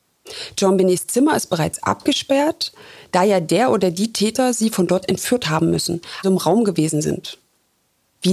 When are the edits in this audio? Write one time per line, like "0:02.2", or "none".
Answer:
0:06.2

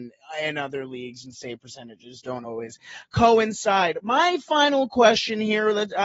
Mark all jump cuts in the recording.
none

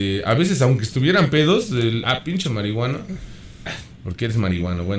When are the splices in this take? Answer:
0:02.0
0:03.7

